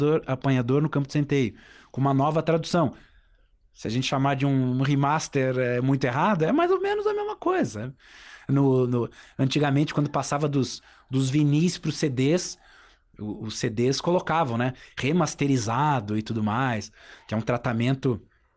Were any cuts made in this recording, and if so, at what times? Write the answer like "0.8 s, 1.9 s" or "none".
none